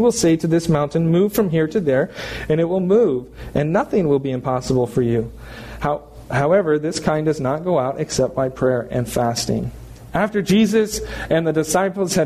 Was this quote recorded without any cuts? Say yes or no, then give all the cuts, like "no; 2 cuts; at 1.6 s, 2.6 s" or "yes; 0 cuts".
yes; 0 cuts